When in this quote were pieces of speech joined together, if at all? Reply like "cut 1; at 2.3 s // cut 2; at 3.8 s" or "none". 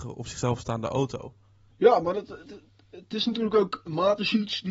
cut 1; at 1.7 s